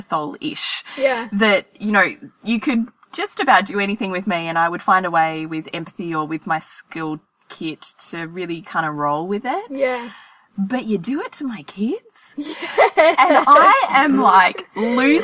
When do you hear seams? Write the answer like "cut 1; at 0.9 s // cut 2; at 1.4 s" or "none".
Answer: none

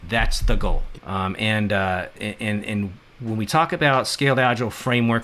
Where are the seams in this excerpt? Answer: cut 1; at 0.9 s

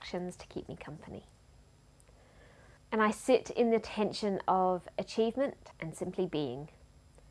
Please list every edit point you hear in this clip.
cut 1; at 2.8 s // cut 2; at 5.7 s

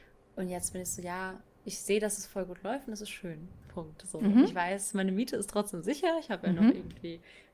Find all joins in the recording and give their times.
none

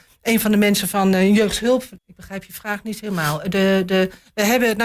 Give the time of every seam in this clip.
cut 1; at 2.0 s

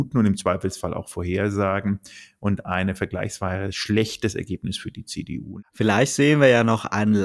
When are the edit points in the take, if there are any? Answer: cut 1; at 5.7 s

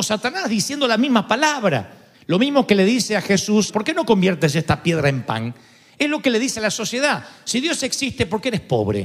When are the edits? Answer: cut 1; at 2.1 s // cut 2; at 3.7 s

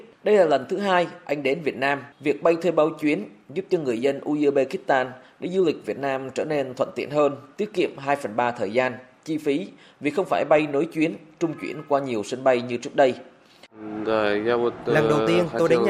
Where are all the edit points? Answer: none

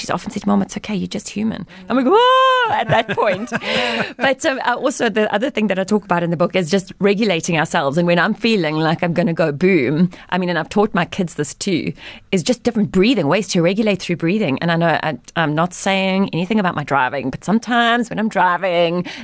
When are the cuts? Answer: none

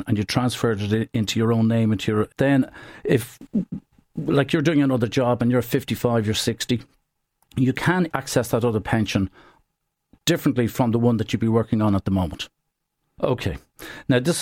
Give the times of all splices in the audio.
cut 1; at 2.3 s // cut 2; at 8.1 s // cut 3; at 13.2 s

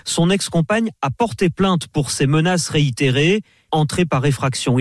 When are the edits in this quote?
cut 1; at 3.7 s

